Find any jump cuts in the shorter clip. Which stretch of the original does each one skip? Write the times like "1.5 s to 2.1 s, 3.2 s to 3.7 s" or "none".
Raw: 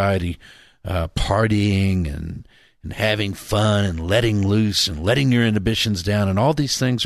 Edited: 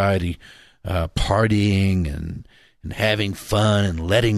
none